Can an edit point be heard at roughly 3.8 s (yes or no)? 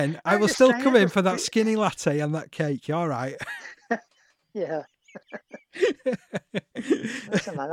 no